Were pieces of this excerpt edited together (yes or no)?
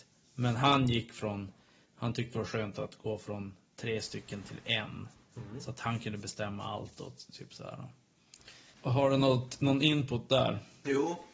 no